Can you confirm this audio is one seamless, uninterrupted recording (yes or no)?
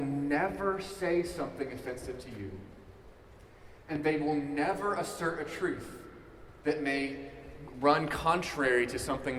yes